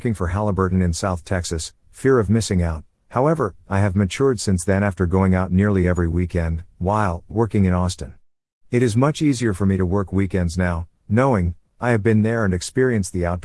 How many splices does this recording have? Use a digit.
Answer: 1